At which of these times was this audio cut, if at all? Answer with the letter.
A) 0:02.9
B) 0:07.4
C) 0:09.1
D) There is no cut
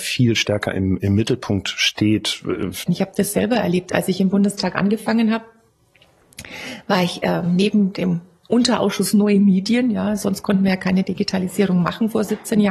A